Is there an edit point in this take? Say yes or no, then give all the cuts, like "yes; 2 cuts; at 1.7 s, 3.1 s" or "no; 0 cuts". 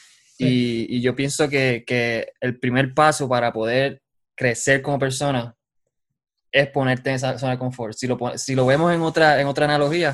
no; 0 cuts